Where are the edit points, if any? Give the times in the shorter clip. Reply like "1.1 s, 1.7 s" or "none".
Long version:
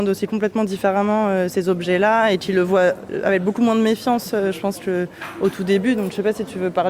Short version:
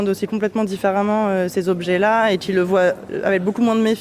none

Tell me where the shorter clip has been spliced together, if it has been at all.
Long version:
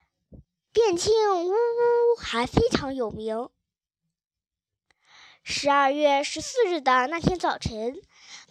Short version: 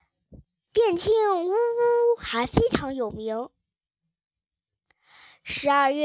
none

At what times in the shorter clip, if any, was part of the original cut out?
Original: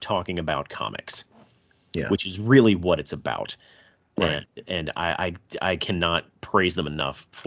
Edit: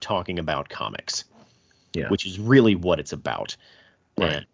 none

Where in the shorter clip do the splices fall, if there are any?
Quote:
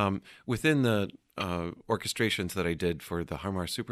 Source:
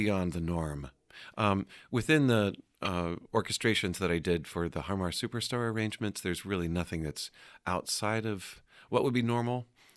none

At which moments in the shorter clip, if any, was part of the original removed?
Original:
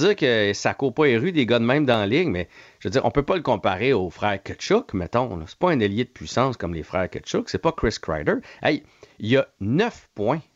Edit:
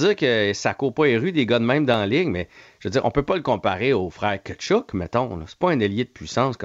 none

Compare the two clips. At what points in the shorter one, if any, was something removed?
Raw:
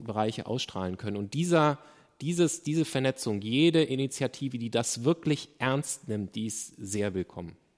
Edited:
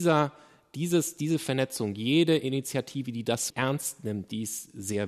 3.5 s

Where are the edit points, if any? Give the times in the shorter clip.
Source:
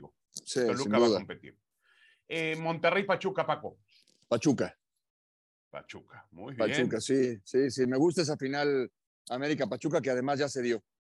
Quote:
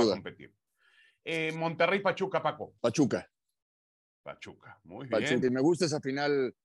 2.8 s, 5.4 s

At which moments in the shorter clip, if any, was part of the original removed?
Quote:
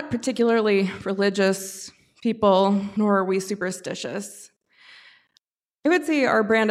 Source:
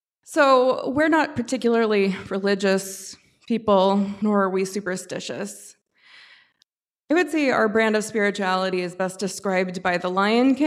none

